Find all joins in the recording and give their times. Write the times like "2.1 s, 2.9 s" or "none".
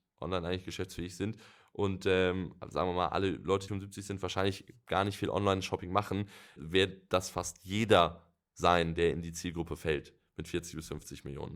3.7 s, 6.6 s

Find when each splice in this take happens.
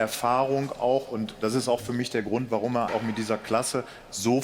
2.9 s

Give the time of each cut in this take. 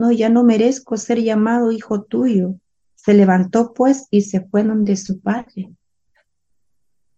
2.8 s

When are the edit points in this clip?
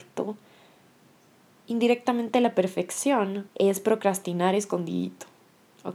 3.5 s

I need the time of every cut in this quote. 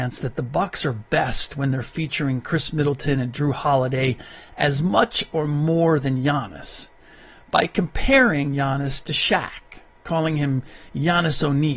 none

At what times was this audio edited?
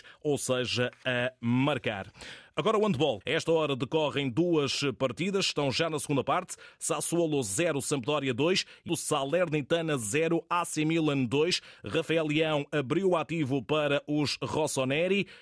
3.2 s, 8.9 s

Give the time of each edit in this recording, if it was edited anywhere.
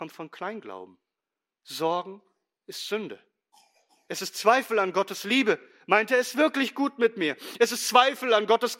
none

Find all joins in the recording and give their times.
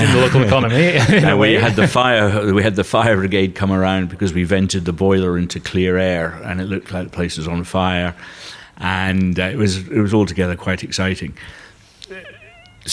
none

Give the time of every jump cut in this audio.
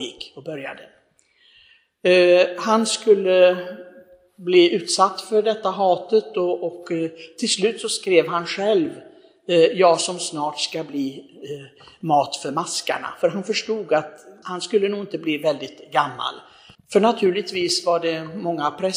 14.4 s, 16.7 s

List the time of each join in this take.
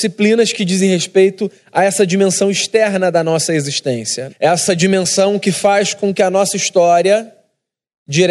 4.3 s

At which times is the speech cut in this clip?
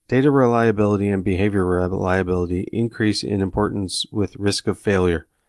none

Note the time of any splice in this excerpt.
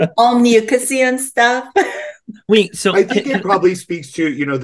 none

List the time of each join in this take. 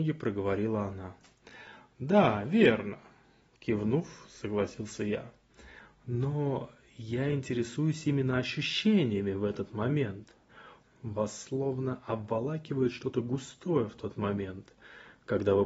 10.8 s

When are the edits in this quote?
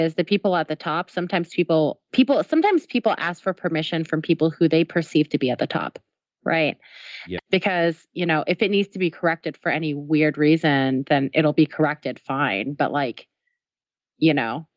7.4 s

